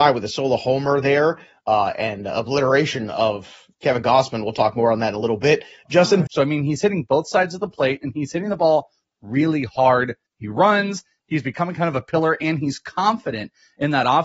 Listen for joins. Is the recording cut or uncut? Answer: cut